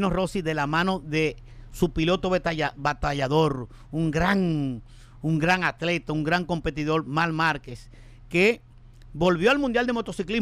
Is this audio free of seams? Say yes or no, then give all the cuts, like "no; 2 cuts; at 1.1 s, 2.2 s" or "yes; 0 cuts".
no; 1 cut; at 1.7 s